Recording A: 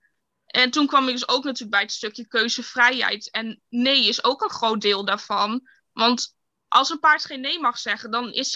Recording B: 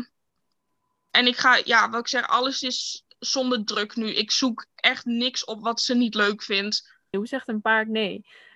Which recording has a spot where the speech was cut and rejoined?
B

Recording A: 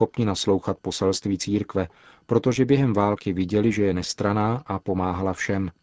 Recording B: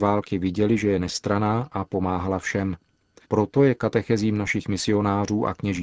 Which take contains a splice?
B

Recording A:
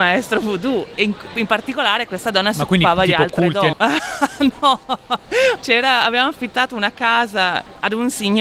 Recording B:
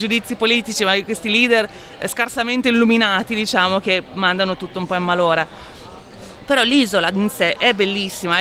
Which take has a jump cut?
A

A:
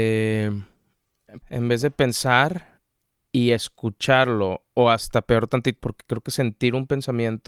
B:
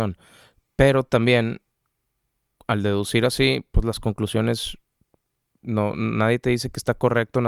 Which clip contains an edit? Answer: A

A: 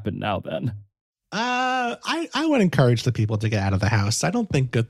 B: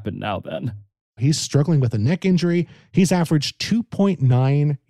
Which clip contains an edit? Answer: B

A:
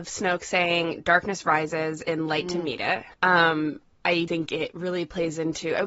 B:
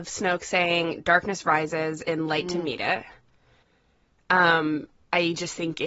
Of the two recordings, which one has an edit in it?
A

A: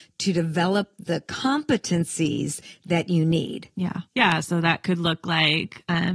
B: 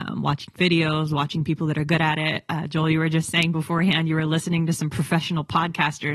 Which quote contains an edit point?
A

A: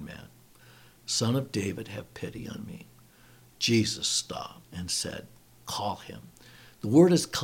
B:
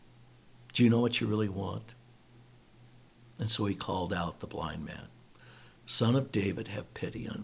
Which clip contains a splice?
A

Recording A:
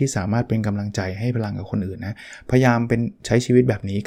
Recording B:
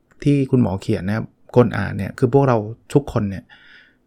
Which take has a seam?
B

